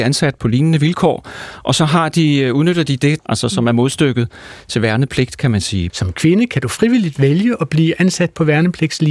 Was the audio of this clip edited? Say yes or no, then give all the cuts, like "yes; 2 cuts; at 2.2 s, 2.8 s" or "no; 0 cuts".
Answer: yes; 2 cuts; at 3.2 s, 5.9 s